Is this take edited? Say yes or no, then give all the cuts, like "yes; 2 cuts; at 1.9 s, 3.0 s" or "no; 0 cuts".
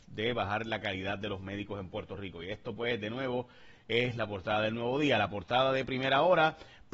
no; 0 cuts